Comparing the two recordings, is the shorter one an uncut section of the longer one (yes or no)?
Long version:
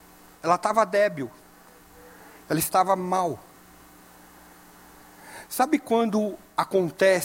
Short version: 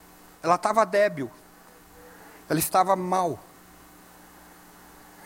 yes